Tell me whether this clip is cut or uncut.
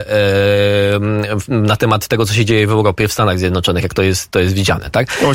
uncut